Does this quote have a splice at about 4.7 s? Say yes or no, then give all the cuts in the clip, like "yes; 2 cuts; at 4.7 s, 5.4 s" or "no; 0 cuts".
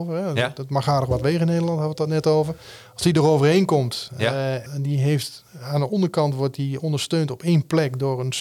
yes; 1 cut; at 4.7 s